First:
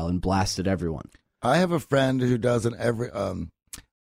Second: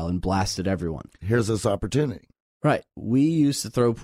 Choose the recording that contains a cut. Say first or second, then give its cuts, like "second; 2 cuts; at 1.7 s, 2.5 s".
second; 1 cut; at 1.2 s